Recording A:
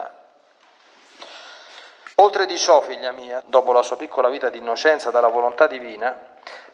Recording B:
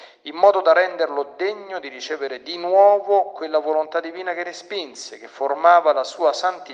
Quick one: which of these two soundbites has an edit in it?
A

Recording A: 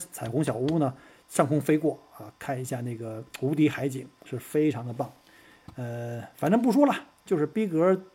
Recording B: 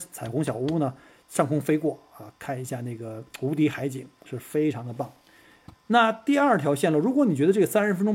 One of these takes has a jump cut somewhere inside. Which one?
B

